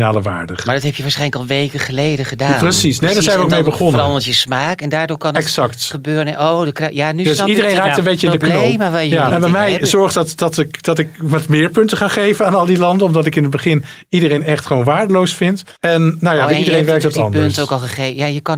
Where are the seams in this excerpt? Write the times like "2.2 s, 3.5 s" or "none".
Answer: 9.3 s, 15.8 s

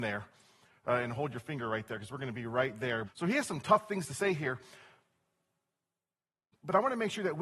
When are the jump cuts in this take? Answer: 3.1 s

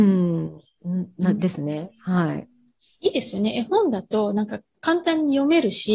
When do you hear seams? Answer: none

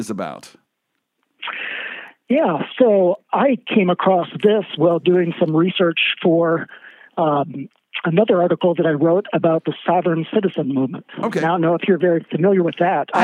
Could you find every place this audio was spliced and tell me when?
none

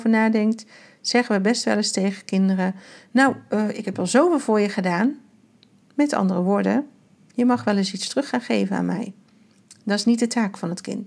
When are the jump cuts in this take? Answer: none

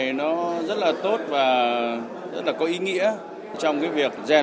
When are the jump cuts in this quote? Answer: none

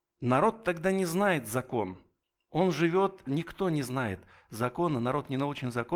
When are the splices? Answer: 3.3 s

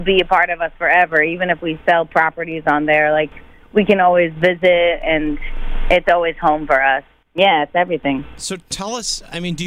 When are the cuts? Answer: 7.2 s

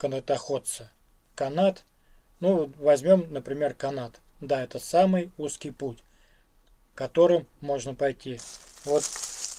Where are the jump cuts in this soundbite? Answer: none

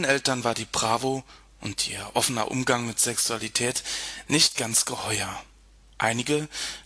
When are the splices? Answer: none

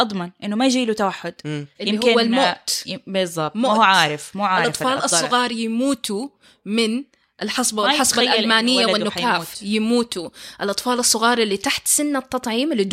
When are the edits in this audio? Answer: 1.7 s

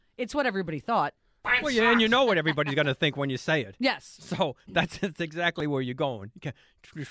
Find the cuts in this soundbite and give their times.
none

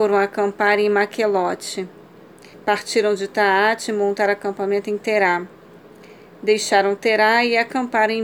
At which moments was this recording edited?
2.5 s

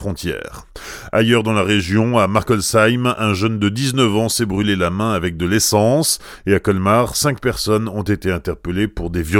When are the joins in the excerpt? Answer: none

